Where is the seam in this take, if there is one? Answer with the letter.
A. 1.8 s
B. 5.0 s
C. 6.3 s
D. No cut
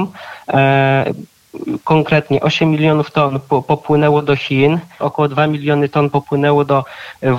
B